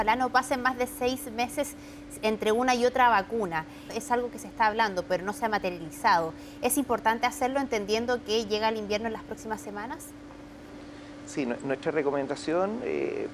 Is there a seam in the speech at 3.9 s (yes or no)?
yes